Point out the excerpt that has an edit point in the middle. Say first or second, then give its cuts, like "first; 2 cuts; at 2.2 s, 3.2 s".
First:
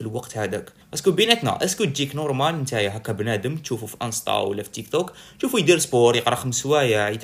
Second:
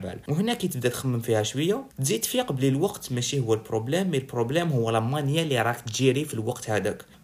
second; 1 cut; at 1.9 s